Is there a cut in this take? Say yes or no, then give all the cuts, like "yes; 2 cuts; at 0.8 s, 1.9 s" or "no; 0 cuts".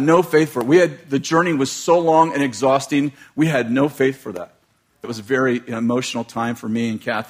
yes; 1 cut; at 5.0 s